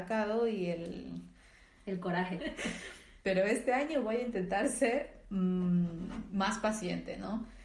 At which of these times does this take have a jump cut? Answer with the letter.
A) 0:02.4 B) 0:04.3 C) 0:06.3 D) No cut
A